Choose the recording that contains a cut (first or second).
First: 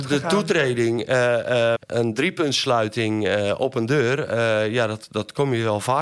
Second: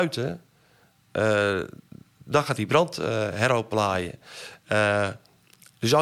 first